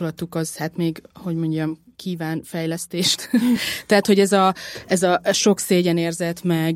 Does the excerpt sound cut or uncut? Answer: uncut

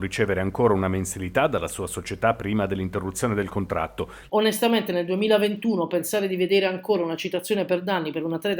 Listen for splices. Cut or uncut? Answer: cut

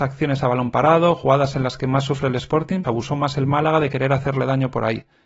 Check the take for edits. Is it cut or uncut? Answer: cut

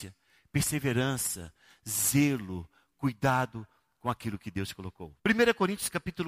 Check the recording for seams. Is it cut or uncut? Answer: uncut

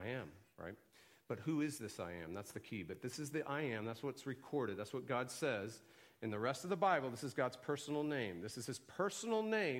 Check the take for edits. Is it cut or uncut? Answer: uncut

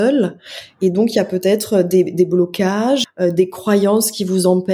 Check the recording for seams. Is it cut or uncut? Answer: cut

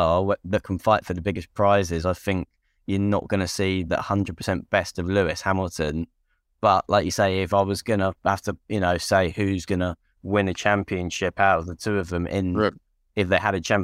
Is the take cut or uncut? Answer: uncut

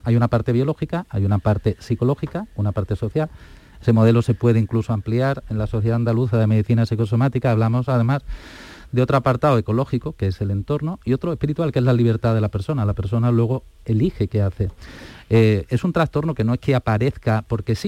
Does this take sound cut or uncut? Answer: uncut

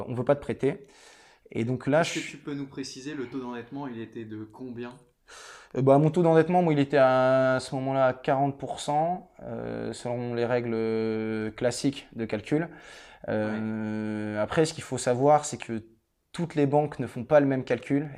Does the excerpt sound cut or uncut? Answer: uncut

